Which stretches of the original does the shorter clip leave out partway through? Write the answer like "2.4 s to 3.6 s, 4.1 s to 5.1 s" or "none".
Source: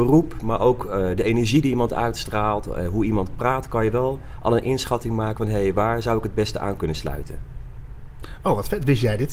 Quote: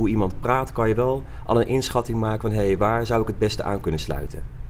none